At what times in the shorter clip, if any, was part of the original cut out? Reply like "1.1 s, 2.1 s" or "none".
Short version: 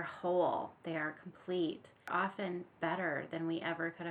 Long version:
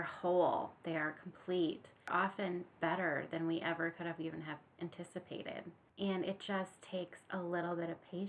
none